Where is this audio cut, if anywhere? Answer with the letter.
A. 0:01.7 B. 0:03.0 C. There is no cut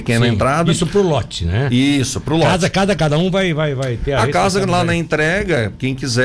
B